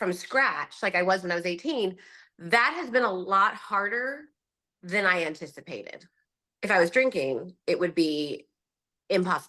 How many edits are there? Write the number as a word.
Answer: one